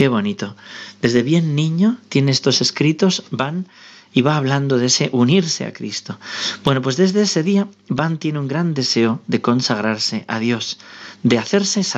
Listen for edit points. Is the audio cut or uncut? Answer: uncut